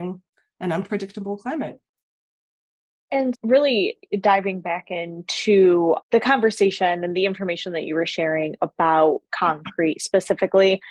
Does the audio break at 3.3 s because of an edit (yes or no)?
yes